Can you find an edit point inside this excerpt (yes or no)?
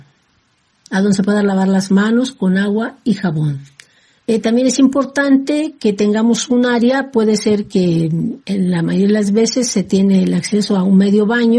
yes